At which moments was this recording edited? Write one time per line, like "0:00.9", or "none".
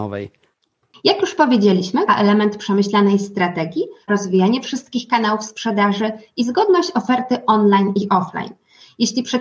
0:02.1
0:04.1